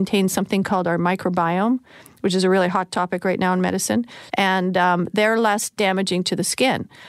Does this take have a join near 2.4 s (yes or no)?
no